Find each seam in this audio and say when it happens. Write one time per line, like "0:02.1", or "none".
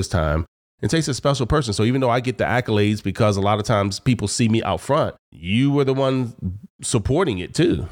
0:05.3